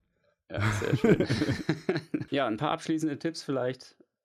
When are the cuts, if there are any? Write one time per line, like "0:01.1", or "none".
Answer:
0:02.3